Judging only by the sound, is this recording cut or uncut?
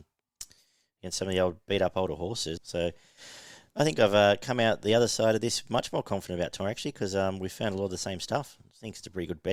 cut